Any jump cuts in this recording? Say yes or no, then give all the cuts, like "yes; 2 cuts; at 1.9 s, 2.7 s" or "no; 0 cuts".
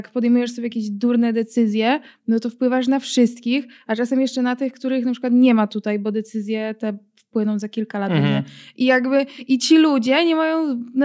no; 0 cuts